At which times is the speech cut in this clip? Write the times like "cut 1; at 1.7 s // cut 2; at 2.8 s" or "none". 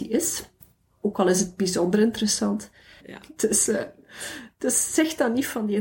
cut 1; at 3.0 s